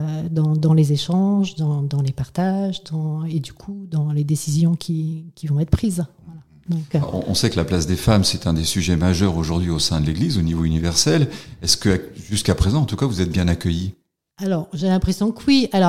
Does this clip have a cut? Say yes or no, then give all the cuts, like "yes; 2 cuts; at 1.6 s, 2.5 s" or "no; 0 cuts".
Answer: no; 0 cuts